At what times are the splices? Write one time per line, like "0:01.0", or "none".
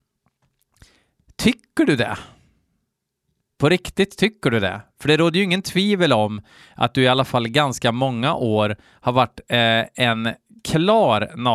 none